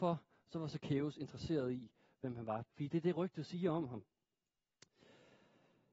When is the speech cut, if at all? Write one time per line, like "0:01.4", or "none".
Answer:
0:02.6